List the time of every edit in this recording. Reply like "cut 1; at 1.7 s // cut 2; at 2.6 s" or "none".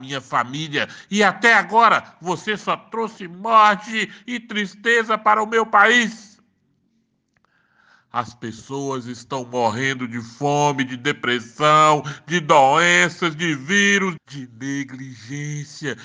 cut 1; at 14.2 s